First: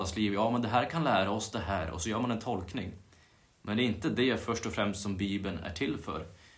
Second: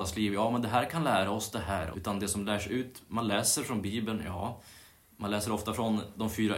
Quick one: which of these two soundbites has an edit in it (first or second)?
second